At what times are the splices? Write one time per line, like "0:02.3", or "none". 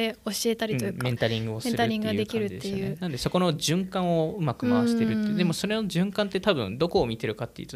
none